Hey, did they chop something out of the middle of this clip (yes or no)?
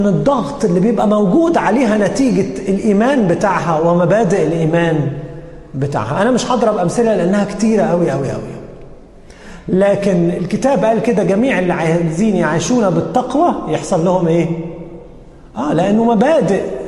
no